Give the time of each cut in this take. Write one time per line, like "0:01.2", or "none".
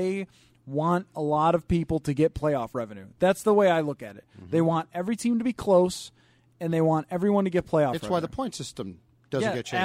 none